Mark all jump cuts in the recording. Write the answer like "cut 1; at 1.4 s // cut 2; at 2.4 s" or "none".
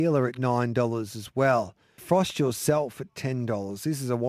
cut 1; at 2.0 s